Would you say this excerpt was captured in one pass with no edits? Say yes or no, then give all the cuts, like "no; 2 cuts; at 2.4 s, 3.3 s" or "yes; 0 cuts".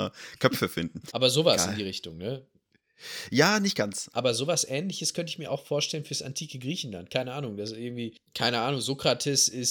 no; 2 cuts; at 1.1 s, 4.1 s